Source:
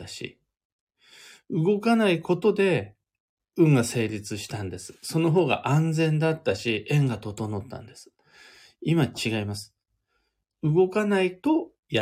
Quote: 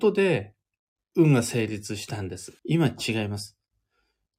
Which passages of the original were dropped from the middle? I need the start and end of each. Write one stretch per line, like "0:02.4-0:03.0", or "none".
0:05.0-0:08.8